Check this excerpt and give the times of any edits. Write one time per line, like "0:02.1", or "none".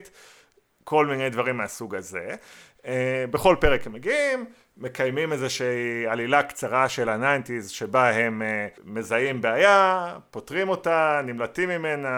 0:08.8